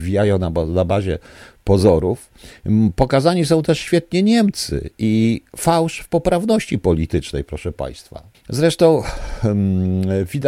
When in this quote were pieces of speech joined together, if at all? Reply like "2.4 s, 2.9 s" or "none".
8.3 s